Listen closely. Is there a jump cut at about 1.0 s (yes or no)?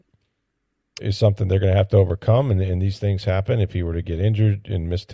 yes